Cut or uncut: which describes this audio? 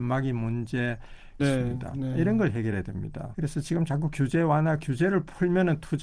cut